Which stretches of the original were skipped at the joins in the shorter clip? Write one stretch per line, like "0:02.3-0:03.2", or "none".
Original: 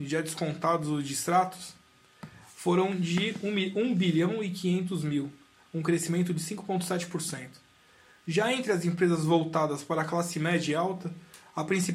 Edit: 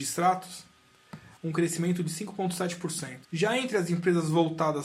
0:02.5-0:05.7
0:07.5-0:08.2